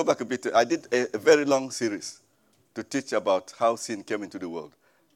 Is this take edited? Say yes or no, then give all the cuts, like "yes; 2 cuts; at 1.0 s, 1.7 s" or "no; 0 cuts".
no; 0 cuts